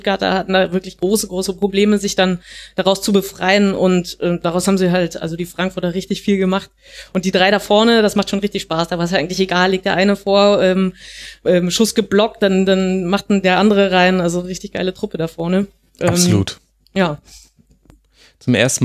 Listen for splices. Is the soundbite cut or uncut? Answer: uncut